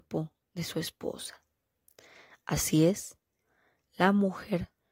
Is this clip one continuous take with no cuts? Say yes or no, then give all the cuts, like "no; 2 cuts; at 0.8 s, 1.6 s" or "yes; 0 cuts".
yes; 0 cuts